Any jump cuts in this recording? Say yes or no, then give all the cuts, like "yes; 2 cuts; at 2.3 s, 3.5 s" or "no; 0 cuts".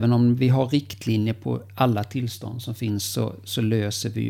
no; 0 cuts